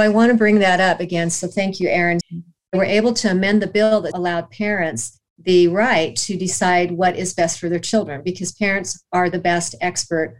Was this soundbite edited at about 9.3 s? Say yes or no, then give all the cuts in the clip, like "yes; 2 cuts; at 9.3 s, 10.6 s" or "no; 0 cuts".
no; 2 cuts; at 2.2 s, 4.1 s